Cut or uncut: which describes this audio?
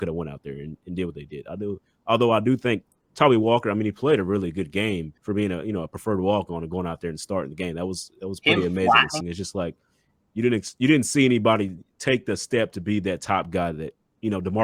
cut